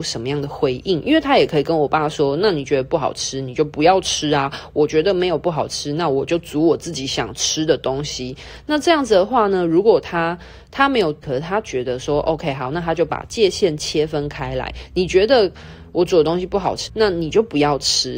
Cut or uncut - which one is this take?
cut